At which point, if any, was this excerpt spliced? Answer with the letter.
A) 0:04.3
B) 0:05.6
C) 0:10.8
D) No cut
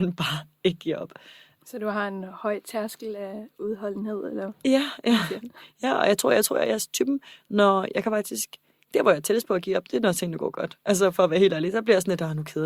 D